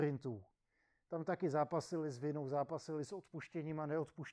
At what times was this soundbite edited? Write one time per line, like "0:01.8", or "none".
none